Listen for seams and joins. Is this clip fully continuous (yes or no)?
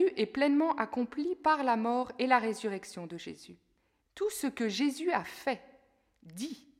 no